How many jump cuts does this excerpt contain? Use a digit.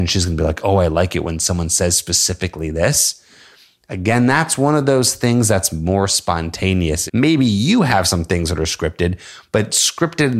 1